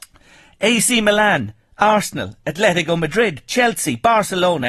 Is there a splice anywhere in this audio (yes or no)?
no